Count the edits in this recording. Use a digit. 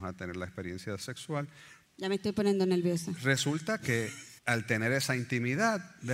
2